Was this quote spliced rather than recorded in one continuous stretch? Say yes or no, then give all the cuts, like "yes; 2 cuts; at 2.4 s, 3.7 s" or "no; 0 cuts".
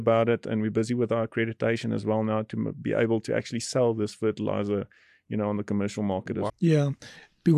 yes; 1 cut; at 6.5 s